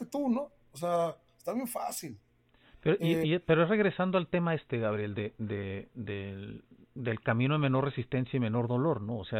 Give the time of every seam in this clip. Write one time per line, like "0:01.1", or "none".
none